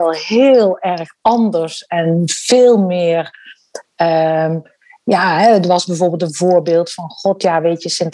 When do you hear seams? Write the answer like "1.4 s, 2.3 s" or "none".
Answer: none